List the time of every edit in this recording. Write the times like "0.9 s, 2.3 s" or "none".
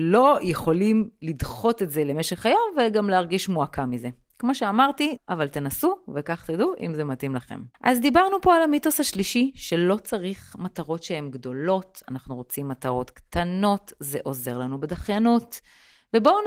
5.2 s, 7.7 s